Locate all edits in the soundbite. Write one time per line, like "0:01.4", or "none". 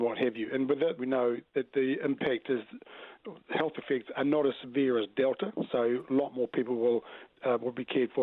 0:01.0